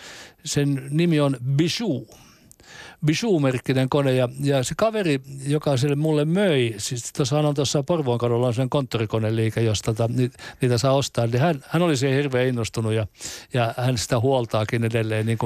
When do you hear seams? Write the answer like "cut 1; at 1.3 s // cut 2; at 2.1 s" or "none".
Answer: none